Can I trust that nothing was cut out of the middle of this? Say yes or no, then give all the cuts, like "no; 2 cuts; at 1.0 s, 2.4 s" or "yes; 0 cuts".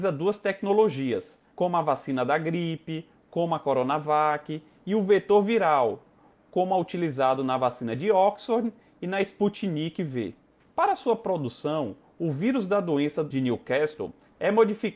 no; 1 cut; at 1.5 s